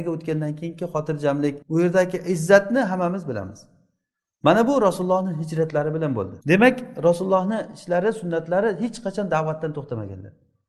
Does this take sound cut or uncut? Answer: cut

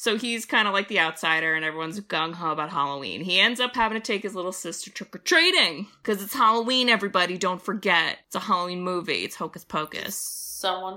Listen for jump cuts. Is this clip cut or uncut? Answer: uncut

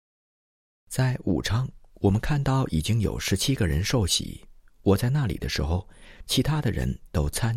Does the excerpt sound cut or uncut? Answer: cut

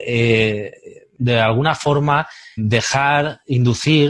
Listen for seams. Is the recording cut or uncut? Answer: cut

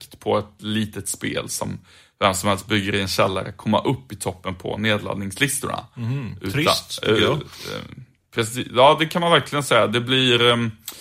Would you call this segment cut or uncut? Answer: uncut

